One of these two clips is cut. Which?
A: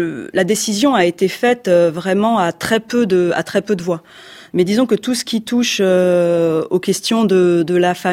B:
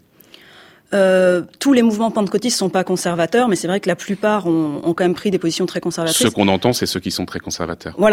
A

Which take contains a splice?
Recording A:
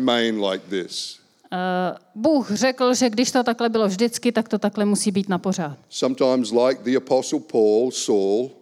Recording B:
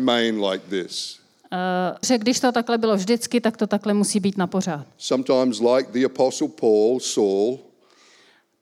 B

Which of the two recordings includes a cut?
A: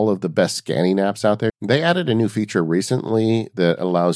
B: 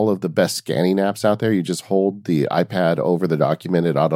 A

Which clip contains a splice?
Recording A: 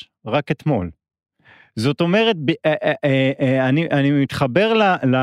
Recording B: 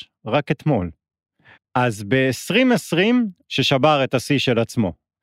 B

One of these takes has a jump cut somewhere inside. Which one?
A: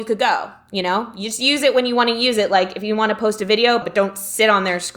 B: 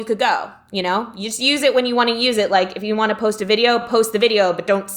A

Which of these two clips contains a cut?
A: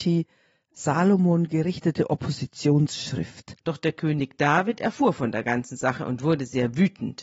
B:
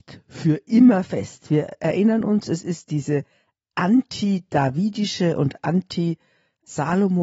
A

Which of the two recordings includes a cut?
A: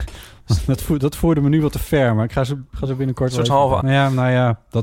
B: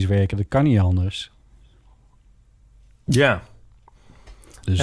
A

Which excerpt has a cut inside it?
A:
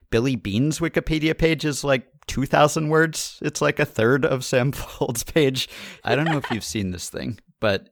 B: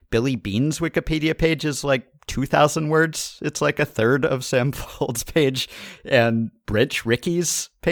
A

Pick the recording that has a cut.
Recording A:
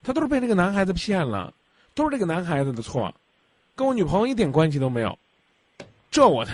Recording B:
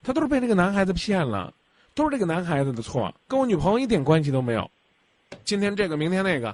B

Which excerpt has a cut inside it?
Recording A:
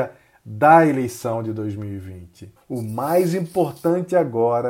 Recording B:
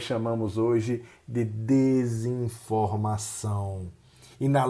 A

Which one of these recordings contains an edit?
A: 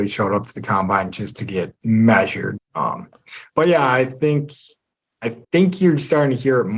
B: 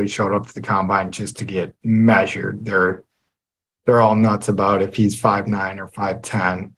A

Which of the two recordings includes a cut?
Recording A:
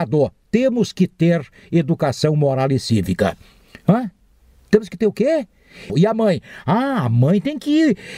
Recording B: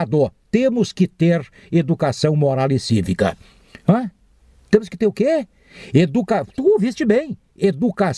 A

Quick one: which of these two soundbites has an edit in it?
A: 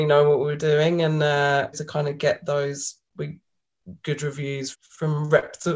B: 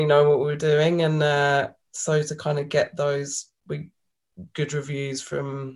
A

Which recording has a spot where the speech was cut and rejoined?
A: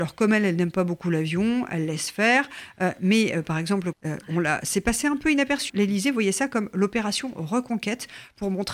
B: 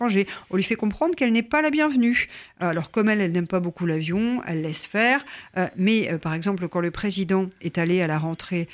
A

